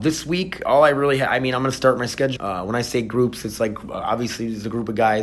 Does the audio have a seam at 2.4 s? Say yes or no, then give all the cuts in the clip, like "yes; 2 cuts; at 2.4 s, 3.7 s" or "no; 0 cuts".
yes; 1 cut; at 2.4 s